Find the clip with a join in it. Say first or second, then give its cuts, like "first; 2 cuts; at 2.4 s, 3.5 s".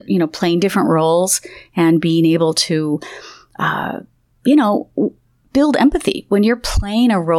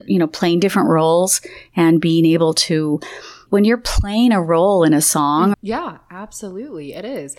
second; 2 cuts; at 3.5 s, 5.5 s